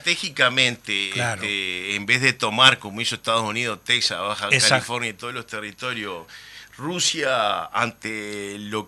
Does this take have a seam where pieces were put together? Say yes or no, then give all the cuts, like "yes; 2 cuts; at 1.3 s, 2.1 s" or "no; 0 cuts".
no; 0 cuts